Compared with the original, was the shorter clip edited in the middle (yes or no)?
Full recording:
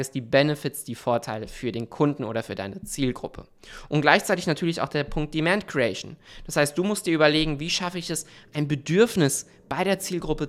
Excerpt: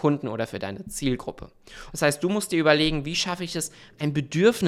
yes